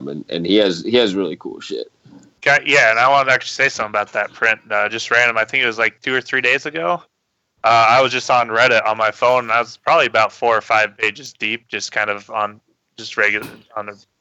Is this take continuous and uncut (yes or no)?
yes